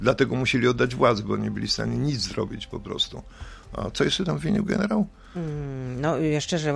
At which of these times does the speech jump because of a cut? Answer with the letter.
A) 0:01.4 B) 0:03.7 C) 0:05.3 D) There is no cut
D